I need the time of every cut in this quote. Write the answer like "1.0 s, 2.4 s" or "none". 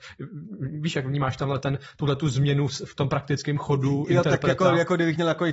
none